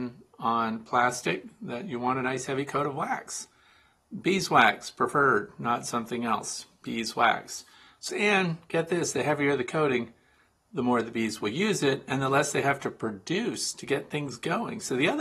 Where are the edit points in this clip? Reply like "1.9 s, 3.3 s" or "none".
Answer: 8.1 s